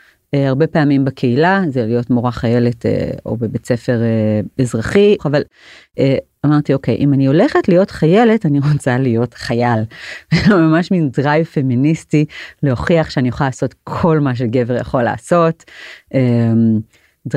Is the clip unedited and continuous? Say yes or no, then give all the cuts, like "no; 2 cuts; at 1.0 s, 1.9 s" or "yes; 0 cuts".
no; 1 cut; at 5.2 s